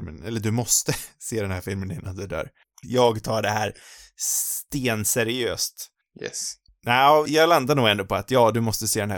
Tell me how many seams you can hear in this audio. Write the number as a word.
two